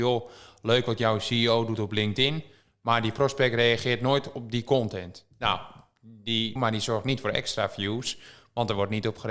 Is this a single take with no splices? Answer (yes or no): no